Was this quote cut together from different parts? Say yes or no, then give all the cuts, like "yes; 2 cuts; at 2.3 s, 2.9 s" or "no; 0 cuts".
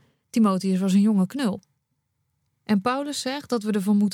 yes; 1 cut; at 2.5 s